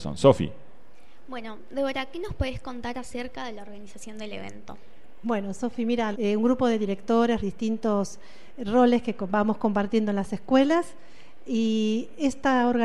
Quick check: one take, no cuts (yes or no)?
no